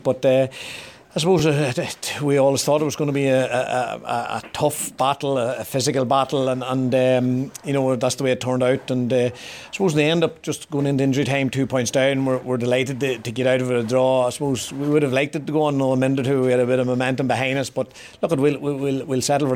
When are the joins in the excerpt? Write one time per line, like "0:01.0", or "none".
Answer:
none